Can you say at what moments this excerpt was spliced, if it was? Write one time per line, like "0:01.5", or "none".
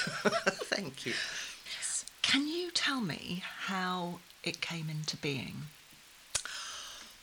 0:01.7